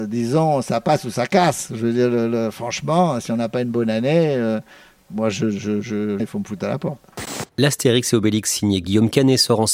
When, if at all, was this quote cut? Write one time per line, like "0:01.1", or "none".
0:06.2
0:07.5

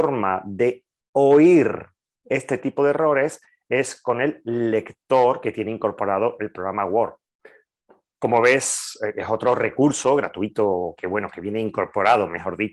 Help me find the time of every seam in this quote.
none

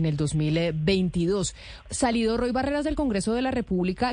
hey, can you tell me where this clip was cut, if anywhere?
none

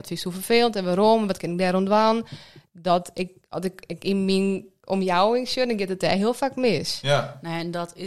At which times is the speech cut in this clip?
none

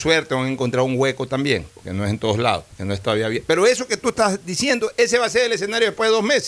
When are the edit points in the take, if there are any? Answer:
none

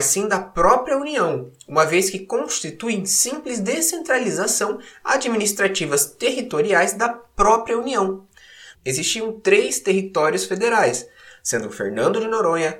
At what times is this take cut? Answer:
0:08.7

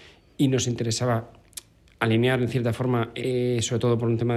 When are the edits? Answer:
none

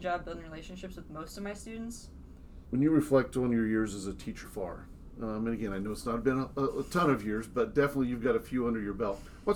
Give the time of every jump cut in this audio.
0:02.6
0:04.4

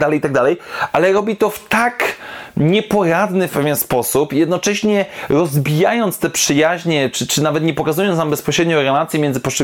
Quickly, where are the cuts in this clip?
none

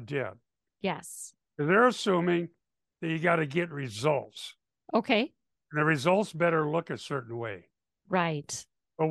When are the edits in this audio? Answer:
none

